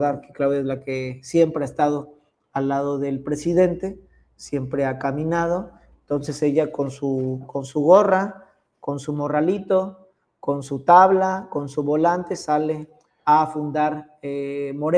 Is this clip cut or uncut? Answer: uncut